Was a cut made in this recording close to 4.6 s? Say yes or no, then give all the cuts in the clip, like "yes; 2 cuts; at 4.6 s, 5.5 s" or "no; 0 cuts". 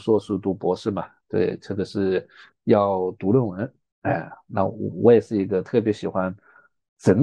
no; 0 cuts